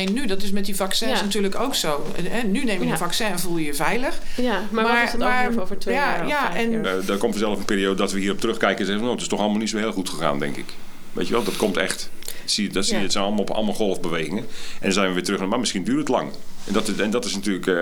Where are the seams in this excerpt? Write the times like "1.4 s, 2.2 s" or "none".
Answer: 5.5 s, 6.8 s